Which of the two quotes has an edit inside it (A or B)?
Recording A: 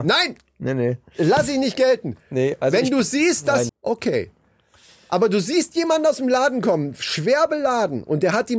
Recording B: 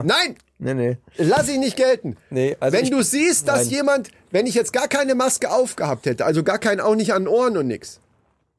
A